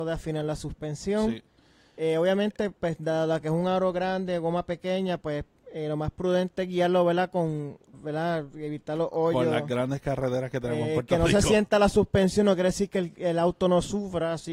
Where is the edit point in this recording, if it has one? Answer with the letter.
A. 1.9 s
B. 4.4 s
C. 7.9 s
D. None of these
C